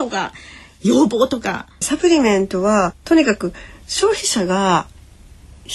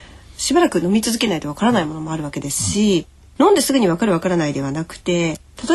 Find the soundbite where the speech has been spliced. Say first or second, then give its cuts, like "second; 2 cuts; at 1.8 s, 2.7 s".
first; 1 cut; at 1.8 s